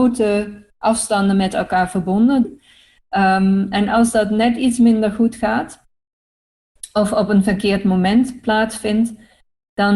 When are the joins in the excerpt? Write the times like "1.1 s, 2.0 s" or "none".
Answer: 2.4 s